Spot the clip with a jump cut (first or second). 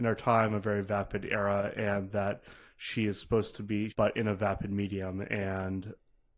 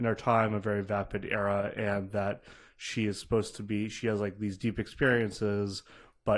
first